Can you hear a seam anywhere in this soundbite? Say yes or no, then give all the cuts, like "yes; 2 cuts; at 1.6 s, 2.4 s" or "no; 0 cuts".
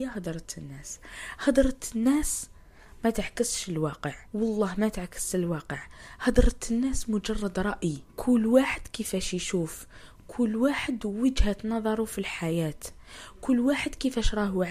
yes; 2 cuts; at 4.3 s, 8.1 s